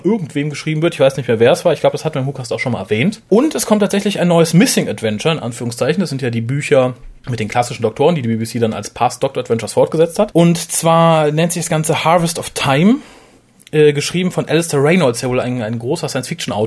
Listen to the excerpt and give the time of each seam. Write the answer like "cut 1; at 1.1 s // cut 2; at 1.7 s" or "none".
cut 1; at 7.2 s